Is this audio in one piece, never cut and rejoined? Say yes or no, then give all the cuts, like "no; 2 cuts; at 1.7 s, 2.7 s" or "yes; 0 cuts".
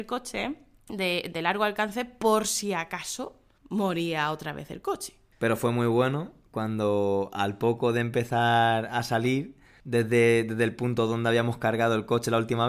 yes; 0 cuts